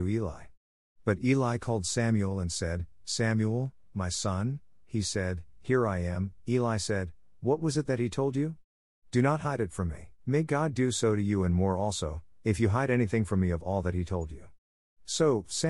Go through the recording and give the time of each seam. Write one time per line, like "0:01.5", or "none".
0:10.2